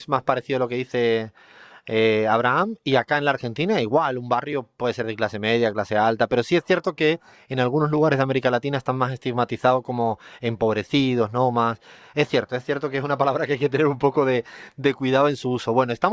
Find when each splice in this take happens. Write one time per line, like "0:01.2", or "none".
none